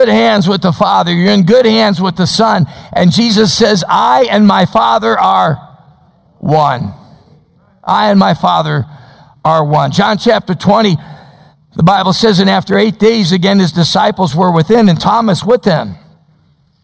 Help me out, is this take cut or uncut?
uncut